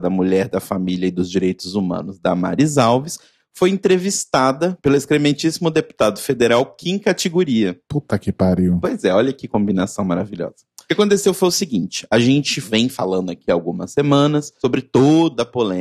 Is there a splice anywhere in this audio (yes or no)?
no